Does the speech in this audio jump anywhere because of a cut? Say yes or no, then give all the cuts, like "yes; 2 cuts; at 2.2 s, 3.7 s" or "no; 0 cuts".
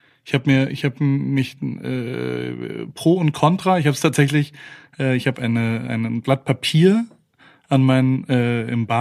no; 0 cuts